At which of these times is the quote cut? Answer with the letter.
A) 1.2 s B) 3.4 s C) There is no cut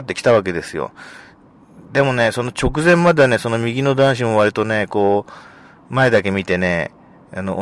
C